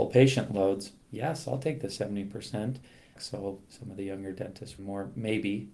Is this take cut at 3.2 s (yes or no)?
yes